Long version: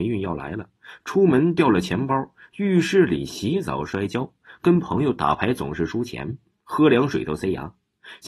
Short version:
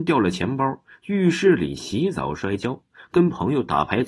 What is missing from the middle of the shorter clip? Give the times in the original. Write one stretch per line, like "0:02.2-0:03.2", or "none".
none